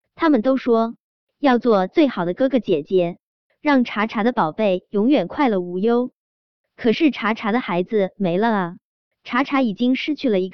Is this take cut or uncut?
uncut